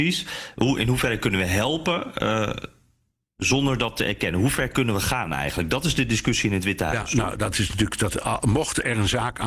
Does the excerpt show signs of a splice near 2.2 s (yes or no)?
no